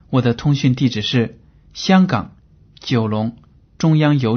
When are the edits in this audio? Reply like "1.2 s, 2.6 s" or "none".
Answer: none

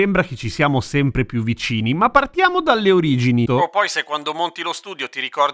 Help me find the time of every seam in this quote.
3.5 s

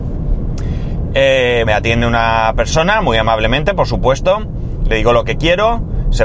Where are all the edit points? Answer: 1.6 s

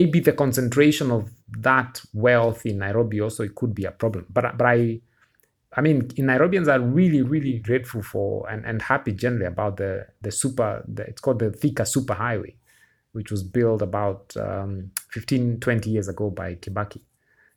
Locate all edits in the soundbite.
7.6 s

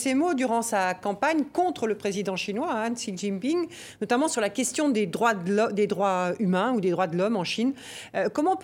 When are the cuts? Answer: none

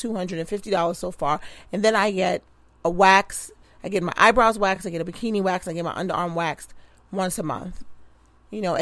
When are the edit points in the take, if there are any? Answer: none

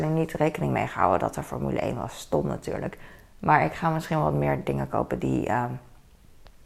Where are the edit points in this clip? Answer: none

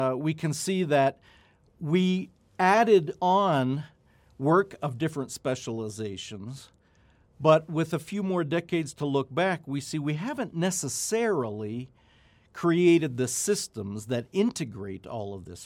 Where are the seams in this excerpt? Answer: none

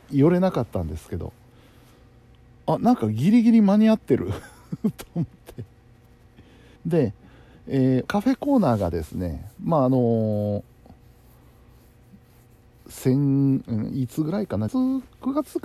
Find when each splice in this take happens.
6.8 s, 8.1 s, 14.7 s

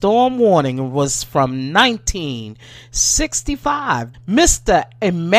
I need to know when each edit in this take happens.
4.1 s

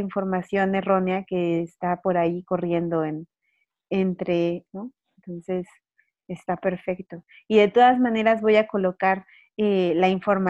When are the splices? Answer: 4.7 s

